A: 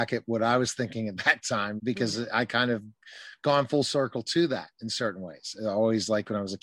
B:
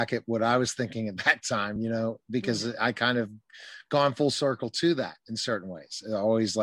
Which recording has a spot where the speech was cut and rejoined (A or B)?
A